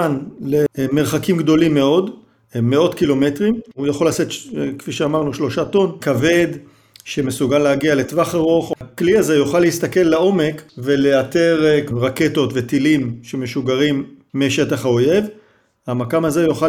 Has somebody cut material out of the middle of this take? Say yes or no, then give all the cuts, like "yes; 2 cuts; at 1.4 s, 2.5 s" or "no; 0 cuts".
yes; 2 cuts; at 6.0 s, 8.8 s